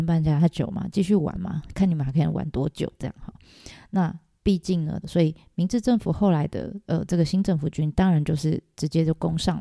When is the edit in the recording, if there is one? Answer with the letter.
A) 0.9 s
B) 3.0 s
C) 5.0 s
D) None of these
C